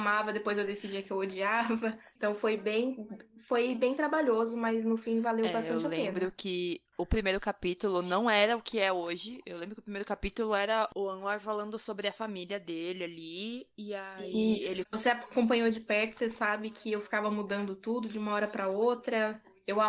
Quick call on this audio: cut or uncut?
cut